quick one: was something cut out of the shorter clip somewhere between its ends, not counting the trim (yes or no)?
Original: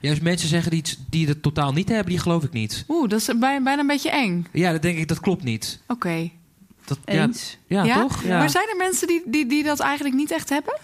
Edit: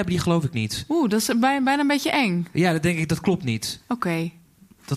no